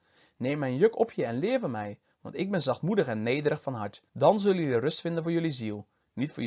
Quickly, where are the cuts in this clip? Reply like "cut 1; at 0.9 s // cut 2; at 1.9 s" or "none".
cut 1; at 4.1 s